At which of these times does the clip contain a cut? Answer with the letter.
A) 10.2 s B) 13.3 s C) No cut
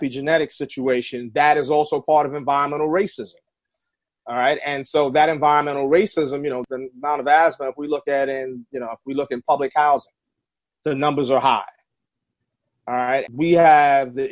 B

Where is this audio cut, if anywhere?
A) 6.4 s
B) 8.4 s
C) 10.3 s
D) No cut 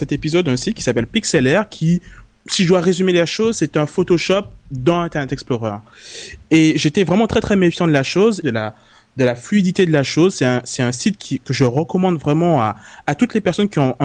B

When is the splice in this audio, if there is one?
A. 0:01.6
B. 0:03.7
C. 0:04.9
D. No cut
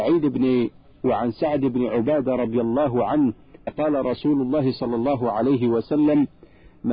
B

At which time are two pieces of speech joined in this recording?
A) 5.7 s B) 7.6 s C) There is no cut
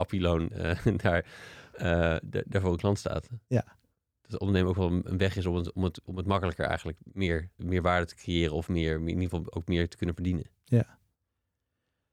B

